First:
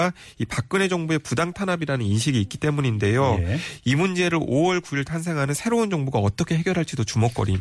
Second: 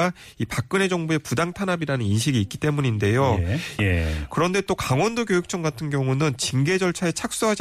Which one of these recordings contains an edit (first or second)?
second